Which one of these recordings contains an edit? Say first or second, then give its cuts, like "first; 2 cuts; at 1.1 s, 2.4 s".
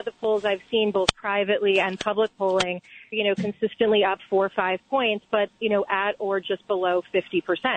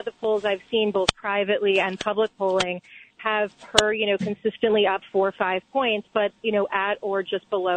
first; 1 cut; at 3.1 s